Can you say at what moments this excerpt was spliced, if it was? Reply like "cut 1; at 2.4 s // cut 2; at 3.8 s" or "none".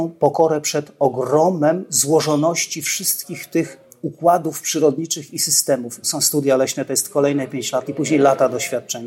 cut 1; at 6.0 s // cut 2; at 7.9 s